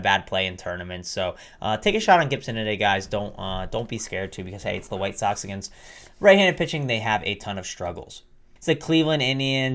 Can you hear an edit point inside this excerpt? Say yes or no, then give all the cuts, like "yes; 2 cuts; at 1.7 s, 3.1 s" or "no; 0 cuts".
yes; 1 cut; at 8.6 s